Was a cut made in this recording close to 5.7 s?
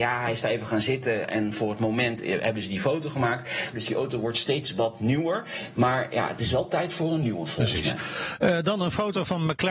no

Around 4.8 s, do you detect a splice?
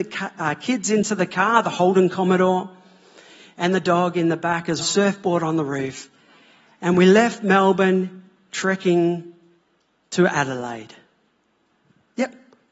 yes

